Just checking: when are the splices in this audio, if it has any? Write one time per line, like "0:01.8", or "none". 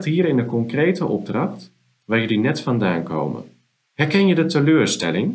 0:02.0
0:03.8